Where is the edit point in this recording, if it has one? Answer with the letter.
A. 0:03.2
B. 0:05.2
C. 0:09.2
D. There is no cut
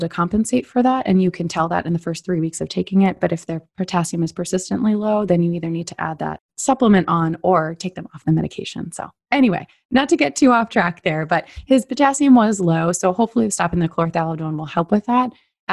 D